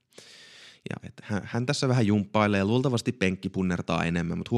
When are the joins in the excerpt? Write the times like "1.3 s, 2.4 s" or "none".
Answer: none